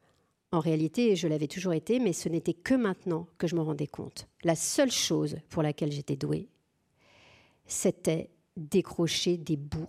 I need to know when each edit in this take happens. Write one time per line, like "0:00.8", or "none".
none